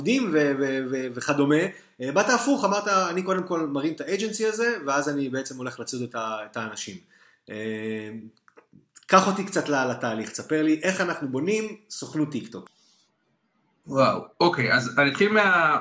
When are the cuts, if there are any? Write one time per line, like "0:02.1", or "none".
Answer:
none